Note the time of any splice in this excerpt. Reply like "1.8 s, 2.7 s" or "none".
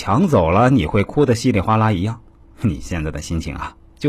none